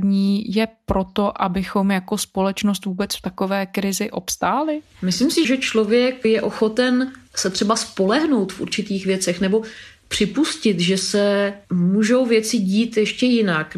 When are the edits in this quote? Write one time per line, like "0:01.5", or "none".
0:05.4